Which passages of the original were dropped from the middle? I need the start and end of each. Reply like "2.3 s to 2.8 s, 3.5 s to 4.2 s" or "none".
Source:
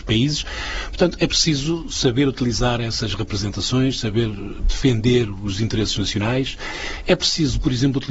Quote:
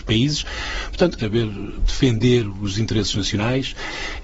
1.2 s to 4.0 s